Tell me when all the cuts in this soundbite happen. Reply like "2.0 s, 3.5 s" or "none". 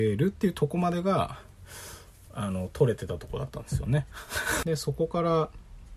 4.6 s